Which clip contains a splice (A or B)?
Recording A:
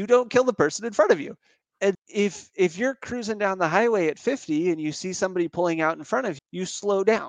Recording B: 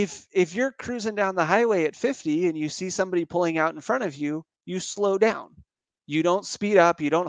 A